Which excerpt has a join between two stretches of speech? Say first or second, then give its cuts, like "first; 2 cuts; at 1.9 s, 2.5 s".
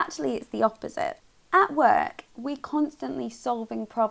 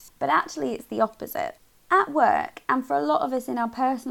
first; 1 cut; at 2.3 s